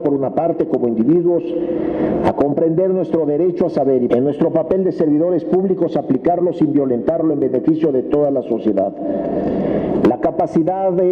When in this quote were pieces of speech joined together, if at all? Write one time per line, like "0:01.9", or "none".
0:04.1
0:10.0